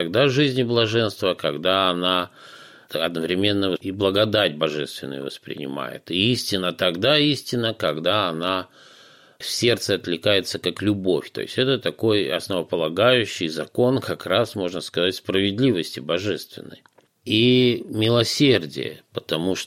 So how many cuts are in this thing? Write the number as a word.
one